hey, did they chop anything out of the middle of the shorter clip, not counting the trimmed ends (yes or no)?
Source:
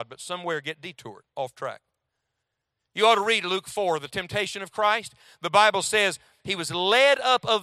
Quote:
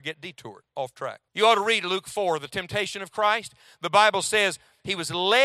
yes